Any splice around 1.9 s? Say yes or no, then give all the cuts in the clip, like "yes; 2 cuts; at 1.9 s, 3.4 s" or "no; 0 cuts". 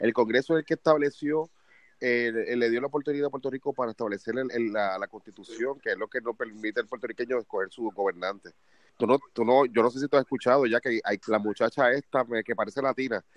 no; 2 cuts; at 8.9 s, 11.2 s